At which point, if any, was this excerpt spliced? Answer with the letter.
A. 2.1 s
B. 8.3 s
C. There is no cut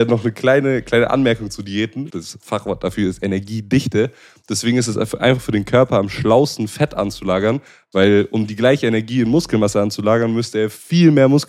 A